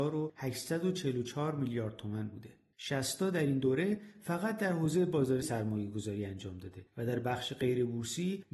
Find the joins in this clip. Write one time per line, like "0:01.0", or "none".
0:05.4